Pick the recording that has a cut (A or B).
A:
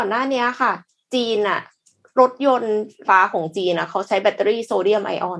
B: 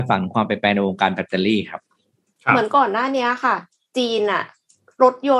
A